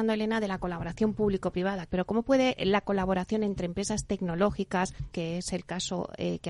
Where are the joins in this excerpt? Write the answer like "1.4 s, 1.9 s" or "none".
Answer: 1.9 s, 5.1 s